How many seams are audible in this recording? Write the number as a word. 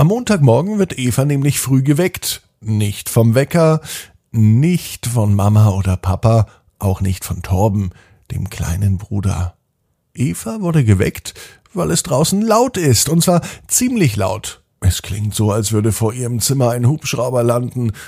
one